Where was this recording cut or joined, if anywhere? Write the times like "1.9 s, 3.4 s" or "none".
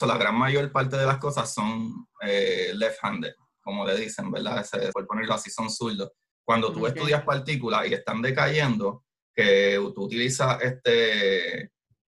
4.9 s